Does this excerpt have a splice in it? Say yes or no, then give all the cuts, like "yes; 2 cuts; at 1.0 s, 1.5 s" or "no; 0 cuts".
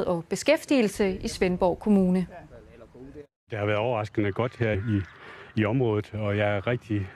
yes; 1 cut; at 4.7 s